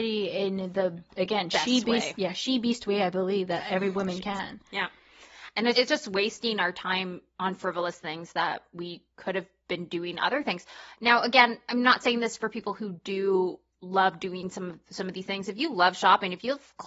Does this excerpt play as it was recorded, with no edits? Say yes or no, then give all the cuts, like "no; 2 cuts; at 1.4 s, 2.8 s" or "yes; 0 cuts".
no; 2 cuts; at 5.7 s, 9.1 s